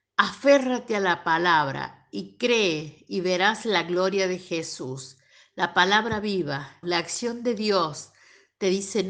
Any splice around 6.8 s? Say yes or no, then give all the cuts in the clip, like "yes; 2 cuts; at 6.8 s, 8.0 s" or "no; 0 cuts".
yes; 1 cut; at 6.8 s